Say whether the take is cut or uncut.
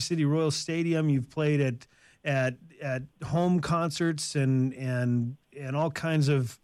uncut